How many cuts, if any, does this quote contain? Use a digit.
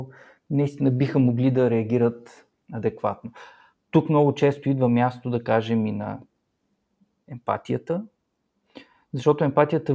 0